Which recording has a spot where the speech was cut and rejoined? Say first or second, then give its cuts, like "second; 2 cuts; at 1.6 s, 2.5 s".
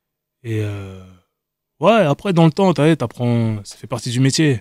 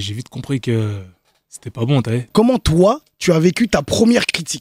second; 1 cut; at 2.3 s